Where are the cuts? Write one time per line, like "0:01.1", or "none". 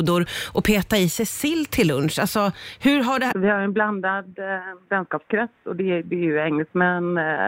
0:03.3